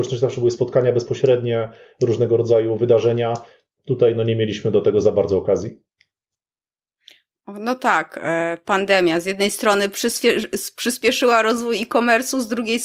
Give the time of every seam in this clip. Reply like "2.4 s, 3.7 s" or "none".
none